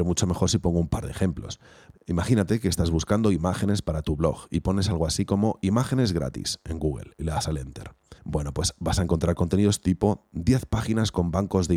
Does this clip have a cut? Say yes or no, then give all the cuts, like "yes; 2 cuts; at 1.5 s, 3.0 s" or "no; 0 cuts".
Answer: yes; 1 cut; at 8.2 s